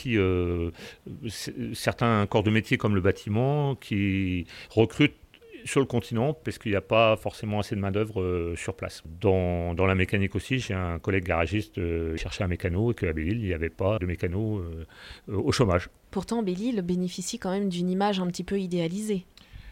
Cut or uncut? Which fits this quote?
cut